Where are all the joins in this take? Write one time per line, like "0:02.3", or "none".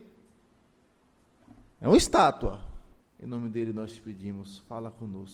0:03.0